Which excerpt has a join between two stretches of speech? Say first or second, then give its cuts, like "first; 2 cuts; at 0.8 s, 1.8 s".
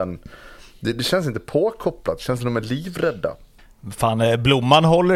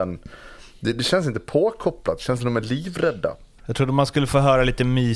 second; 1 cut; at 3.6 s